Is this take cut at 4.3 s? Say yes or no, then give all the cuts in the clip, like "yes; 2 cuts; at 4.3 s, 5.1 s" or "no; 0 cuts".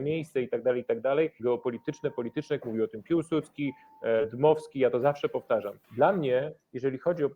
no; 3 cuts; at 1.4 s, 2.6 s, 5.8 s